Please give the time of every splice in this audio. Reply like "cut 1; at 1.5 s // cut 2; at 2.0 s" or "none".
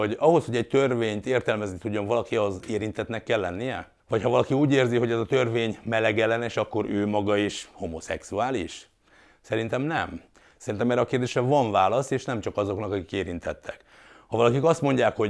none

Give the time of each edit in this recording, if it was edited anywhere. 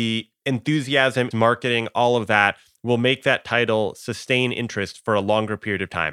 cut 1; at 1.3 s

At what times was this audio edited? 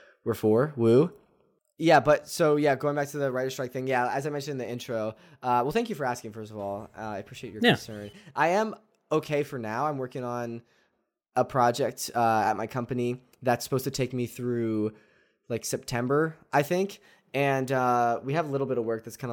none

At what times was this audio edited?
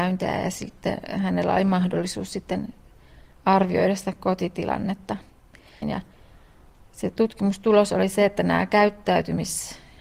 cut 1; at 5.8 s

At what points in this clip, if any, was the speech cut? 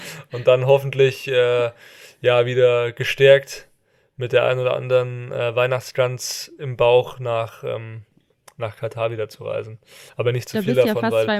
none

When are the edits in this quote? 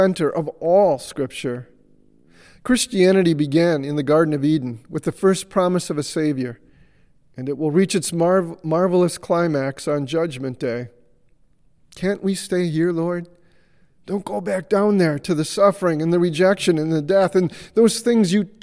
cut 1; at 11.8 s

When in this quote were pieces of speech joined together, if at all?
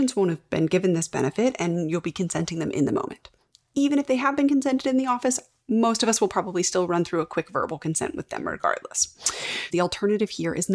cut 1; at 9.7 s

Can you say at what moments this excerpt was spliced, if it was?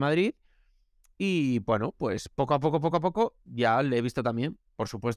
none

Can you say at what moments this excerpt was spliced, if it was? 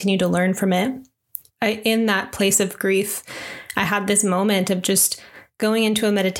none

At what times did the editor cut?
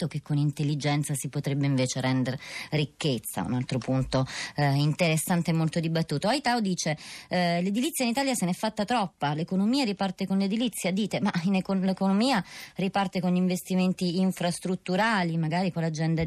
none

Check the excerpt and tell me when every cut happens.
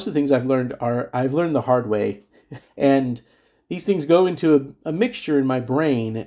cut 1; at 2.6 s

